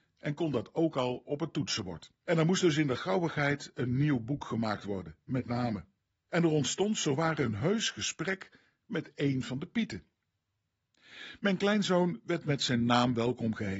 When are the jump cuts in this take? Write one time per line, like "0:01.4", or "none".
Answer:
0:02.3
0:06.3